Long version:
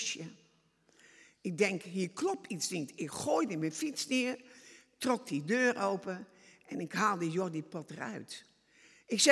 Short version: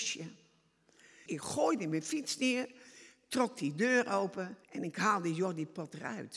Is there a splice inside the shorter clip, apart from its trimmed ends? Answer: yes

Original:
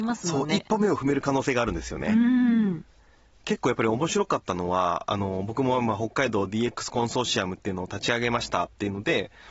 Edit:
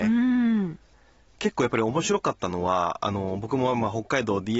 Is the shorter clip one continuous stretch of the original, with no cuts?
yes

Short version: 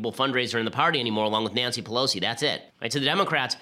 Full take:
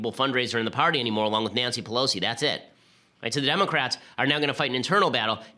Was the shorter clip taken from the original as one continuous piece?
no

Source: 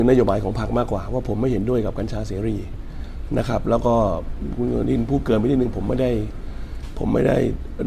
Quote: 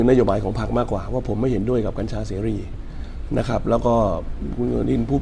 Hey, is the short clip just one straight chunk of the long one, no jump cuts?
yes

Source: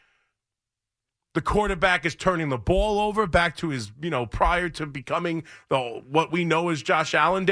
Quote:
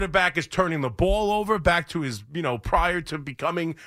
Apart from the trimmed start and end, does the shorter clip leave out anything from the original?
no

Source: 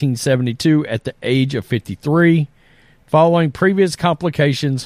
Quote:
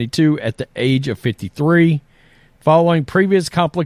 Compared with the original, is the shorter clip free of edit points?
yes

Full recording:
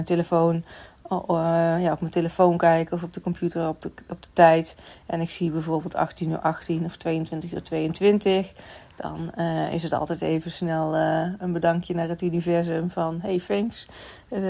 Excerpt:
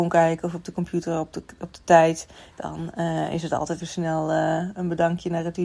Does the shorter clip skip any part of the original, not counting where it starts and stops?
yes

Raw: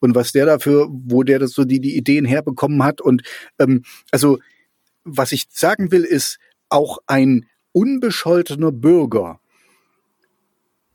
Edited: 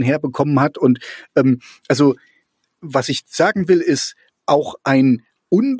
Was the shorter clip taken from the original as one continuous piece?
yes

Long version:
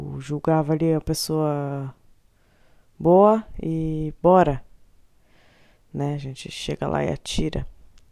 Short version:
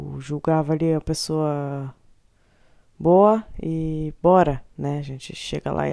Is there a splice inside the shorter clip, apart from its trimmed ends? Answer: yes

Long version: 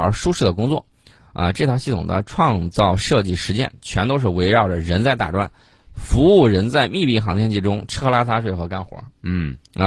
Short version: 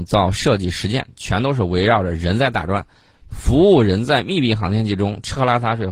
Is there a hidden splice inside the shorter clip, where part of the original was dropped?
no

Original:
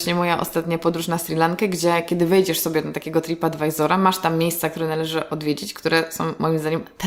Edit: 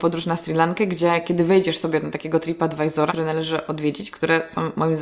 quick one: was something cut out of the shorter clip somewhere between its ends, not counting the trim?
yes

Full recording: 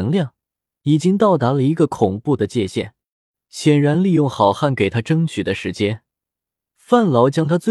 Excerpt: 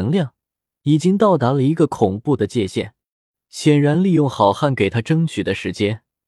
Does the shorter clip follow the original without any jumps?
yes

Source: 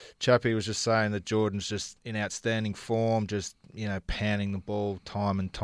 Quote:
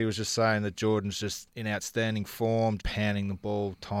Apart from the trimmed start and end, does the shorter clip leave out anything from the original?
yes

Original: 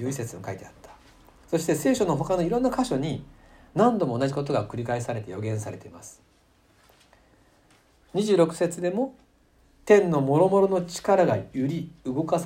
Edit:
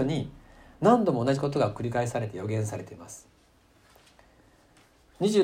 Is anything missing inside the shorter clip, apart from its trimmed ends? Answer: no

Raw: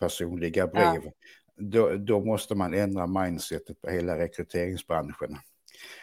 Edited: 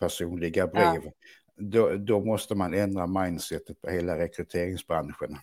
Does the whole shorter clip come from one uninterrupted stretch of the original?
yes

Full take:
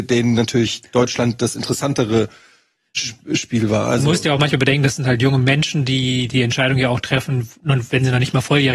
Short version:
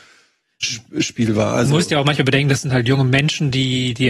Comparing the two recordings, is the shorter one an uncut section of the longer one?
yes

